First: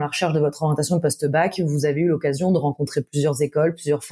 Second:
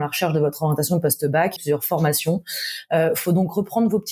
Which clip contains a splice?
second; 1 cut; at 1.6 s

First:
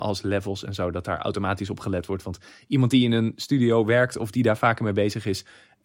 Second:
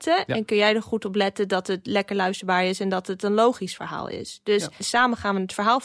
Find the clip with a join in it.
second; 1 cut; at 4.8 s

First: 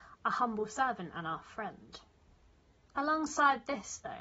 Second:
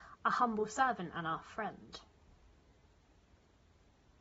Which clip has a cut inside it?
first; 1 cut; at 2.8 s

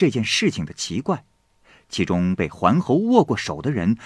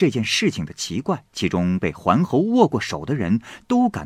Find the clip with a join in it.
second; 1 cut; at 1.3 s

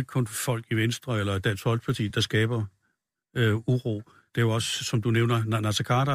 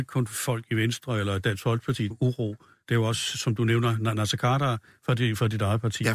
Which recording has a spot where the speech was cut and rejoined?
second; 1 cut; at 2.1 s

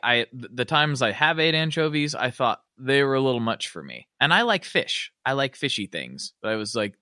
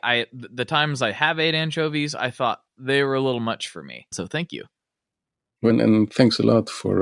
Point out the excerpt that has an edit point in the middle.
second; 2 cuts; at 4.1 s, 5.7 s

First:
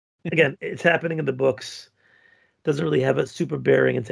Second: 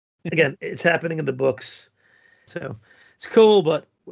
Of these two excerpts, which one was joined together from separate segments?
second; 1 cut; at 2.5 s

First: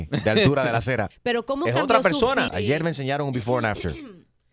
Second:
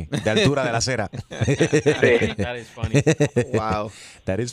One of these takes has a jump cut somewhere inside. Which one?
first; 2 cuts; at 1.1 s, 2.5 s

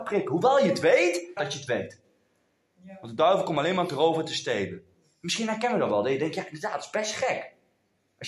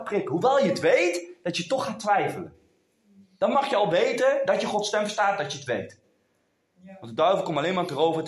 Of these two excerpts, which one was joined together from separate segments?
first; 1 cut; at 1.4 s

